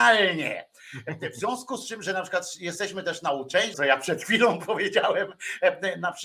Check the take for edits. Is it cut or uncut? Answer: cut